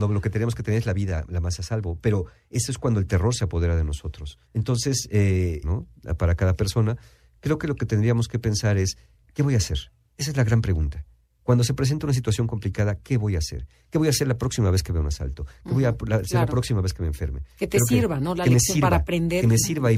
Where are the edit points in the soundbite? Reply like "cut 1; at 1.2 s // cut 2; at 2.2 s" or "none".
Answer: cut 1; at 4.4 s // cut 2; at 5.6 s

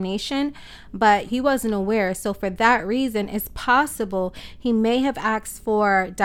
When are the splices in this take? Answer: cut 1; at 1.3 s

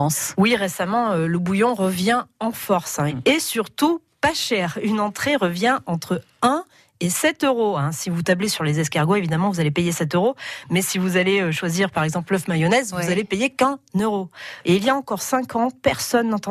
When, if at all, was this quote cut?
cut 1; at 3.1 s // cut 2; at 14.6 s

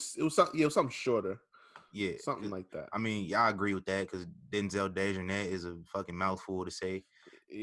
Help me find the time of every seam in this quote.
none

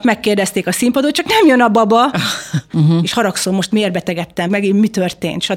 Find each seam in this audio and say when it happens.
cut 1; at 2.7 s // cut 2; at 4.5 s

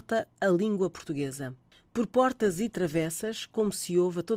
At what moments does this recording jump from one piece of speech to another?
none

